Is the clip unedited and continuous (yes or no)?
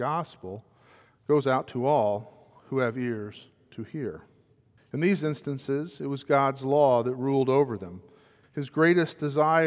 no